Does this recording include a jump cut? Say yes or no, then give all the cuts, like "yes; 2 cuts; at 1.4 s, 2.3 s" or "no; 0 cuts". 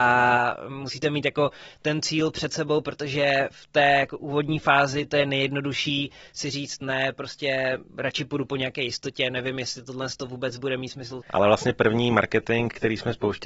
yes; 2 cuts; at 7.9 s, 11.2 s